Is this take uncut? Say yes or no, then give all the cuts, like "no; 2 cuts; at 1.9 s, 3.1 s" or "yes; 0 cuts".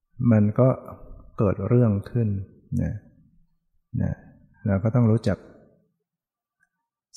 yes; 0 cuts